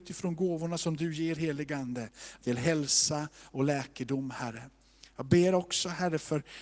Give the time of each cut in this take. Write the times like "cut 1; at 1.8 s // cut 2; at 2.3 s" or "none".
cut 1; at 2.4 s